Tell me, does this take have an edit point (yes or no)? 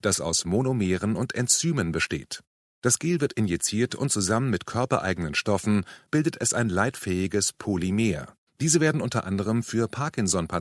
yes